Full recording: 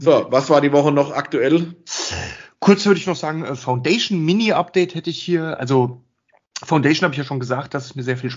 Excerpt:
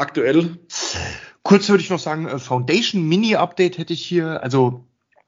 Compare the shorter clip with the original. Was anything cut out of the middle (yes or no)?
no